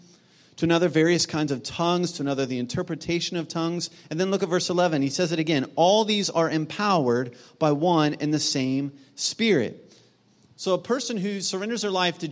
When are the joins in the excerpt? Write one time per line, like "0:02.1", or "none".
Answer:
none